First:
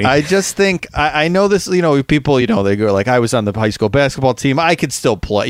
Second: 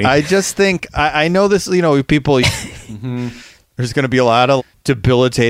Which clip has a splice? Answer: second; 2 cuts; at 2.4 s, 4.6 s

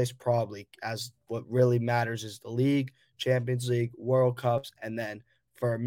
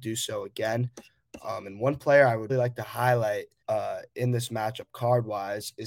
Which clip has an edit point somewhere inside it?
second; 2 cuts; at 2.5 s, 3.6 s

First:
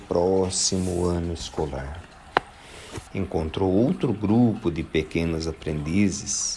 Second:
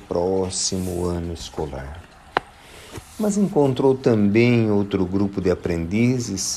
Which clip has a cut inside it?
first; 1 cut; at 3.1 s

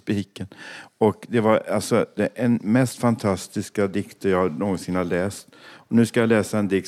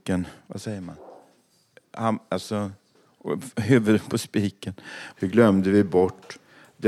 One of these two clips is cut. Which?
second; 1 cut; at 5.1 s

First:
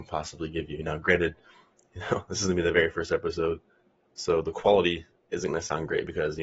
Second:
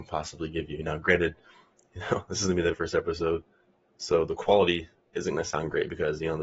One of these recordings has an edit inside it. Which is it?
second; 1 cut; at 2.7 s

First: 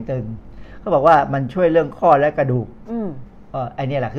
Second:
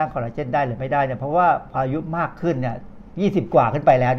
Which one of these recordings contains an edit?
second; 1 cut; at 1.7 s

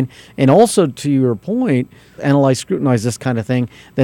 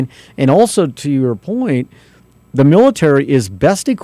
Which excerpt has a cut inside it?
first; 1 cut; at 2.2 s

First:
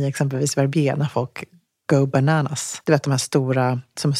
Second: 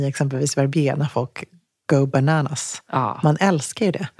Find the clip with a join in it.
first; 1 cut; at 2.8 s

